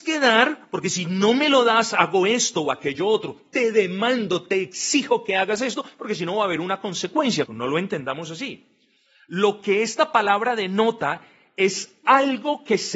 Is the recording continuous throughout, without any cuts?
no; 1 cut; at 7.5 s

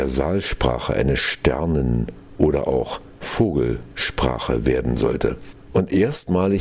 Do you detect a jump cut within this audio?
yes; 1 cut; at 5.7 s

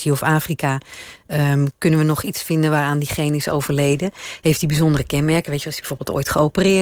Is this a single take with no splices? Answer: yes; 0 cuts

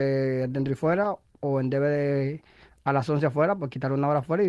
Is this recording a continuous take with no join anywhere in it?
yes; 0 cuts

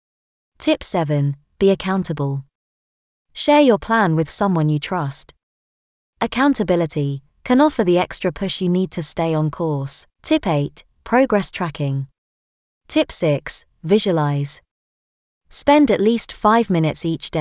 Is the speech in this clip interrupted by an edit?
yes; 2 cuts; at 10.1 s, 12.7 s

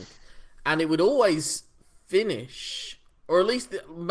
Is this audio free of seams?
yes; 0 cuts

